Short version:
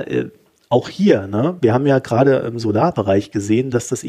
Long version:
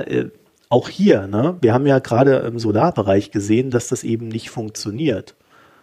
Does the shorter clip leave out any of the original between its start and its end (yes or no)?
no